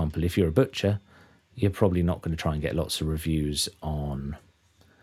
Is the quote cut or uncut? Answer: uncut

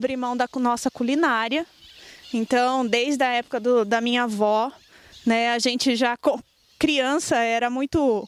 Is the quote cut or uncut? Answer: uncut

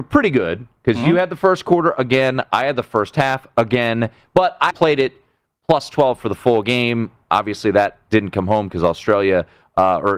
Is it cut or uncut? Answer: cut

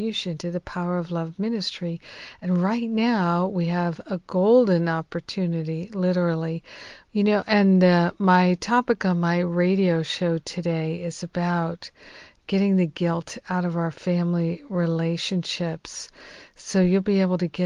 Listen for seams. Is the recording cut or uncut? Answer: cut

